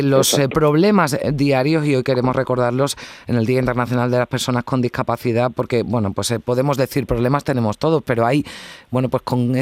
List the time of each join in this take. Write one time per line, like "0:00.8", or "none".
none